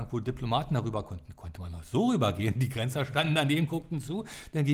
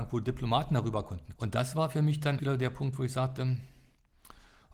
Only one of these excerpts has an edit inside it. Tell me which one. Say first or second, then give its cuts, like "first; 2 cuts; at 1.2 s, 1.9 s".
second; 2 cuts; at 1.4 s, 2.4 s